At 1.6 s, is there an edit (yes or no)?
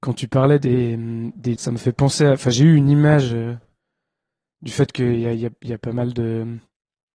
yes